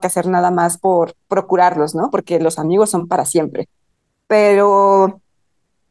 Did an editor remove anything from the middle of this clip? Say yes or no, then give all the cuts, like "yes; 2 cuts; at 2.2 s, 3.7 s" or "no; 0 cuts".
no; 0 cuts